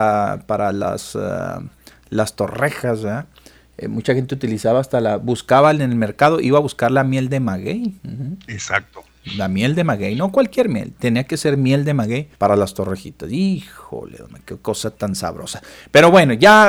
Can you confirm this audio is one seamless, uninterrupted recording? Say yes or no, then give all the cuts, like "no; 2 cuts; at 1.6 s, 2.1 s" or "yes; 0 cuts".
no; 2 cuts; at 8.0 s, 12.3 s